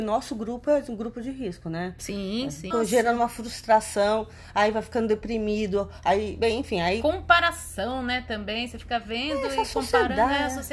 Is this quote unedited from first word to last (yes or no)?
no